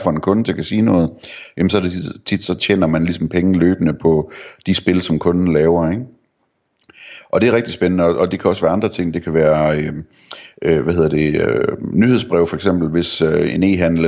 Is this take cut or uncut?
uncut